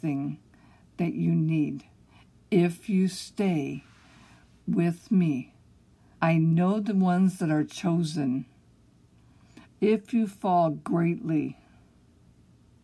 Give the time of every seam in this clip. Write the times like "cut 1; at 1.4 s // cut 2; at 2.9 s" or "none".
cut 1; at 6.1 s // cut 2; at 9.7 s